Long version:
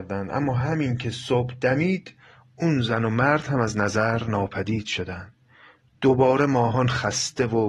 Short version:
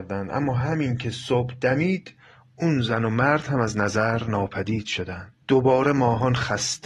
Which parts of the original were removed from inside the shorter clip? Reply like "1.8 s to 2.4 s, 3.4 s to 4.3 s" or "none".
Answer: 5.4 s to 6.0 s